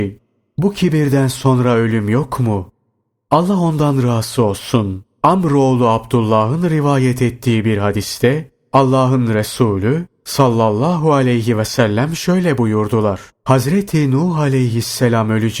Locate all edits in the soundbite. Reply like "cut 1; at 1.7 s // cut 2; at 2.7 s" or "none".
cut 1; at 13.3 s

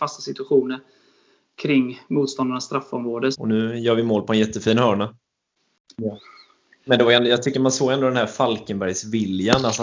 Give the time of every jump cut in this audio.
cut 1; at 3.3 s // cut 2; at 5.9 s

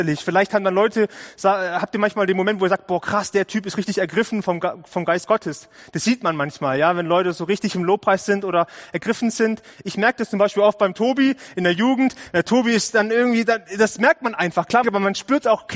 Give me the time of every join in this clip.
cut 1; at 14.8 s

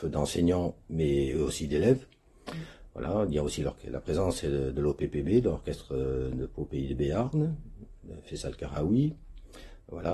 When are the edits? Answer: none

